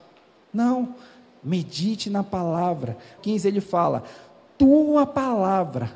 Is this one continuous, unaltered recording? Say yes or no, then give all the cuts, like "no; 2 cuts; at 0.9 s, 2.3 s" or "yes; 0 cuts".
no; 1 cut; at 3.2 s